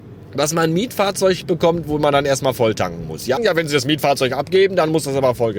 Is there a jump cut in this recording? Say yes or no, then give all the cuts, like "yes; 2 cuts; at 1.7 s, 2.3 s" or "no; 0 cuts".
yes; 1 cut; at 3.4 s